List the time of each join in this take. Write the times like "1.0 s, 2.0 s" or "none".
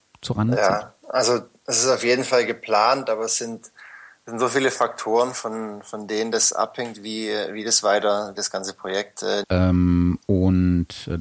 8.4 s, 9.4 s